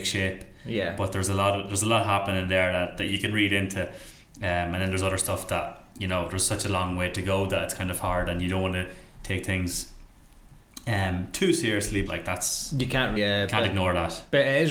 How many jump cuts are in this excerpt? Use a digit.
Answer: 2